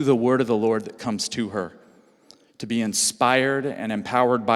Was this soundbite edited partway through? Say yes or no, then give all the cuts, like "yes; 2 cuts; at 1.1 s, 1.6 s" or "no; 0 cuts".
no; 0 cuts